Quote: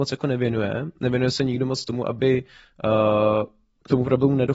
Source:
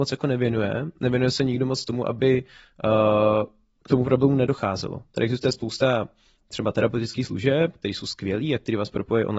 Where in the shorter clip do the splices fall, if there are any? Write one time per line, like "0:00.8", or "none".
none

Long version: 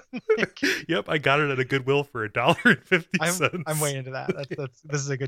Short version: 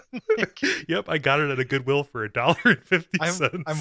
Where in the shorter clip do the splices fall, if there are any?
none

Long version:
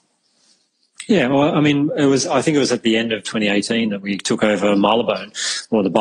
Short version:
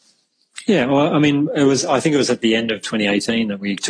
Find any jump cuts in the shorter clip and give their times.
none

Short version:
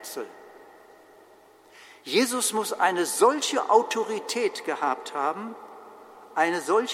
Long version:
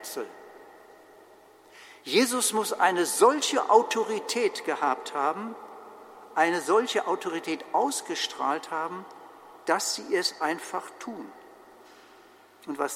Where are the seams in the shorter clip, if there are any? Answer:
none

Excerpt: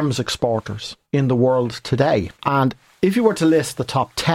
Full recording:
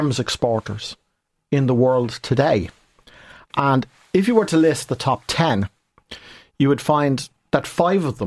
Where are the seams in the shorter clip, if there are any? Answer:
0:01.0
0:02.4

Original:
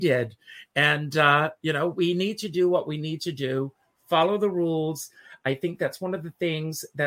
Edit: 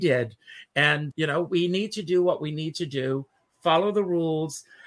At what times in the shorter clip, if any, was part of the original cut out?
0:01.1

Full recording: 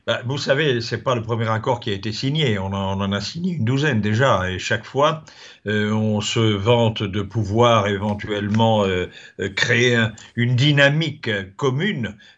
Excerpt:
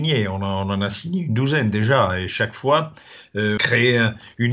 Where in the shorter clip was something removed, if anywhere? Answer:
0:03.6

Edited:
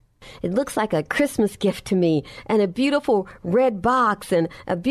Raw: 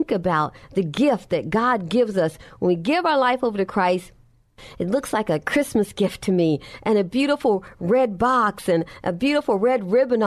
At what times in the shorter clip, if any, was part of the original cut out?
none

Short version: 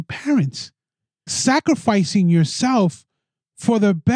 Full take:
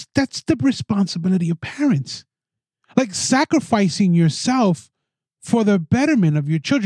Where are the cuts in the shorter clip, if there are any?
0:01.3

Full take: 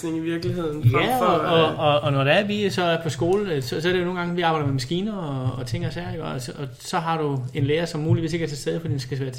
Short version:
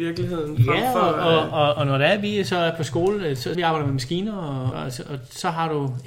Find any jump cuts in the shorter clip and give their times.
0:03.6
0:04.7

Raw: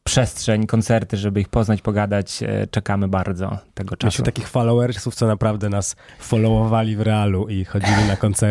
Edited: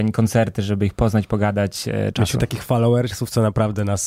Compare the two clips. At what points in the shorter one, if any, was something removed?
0:02.1

